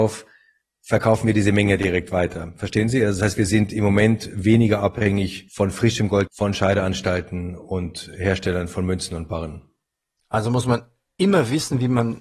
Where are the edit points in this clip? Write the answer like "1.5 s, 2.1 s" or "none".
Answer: 6.3 s